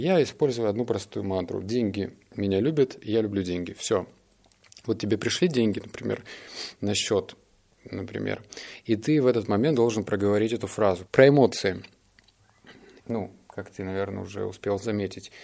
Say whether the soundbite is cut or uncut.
cut